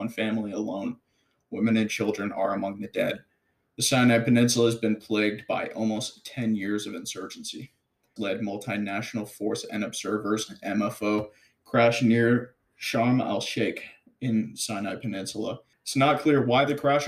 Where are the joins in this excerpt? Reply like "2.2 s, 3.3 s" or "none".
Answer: 8.2 s, 15.7 s